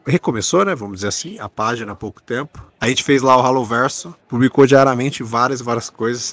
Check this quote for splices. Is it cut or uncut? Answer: cut